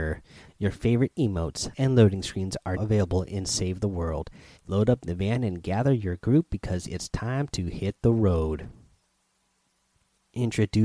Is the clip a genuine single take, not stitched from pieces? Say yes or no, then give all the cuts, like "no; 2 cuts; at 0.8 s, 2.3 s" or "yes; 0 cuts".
no; 3 cuts; at 1.7 s, 2.8 s, 4.6 s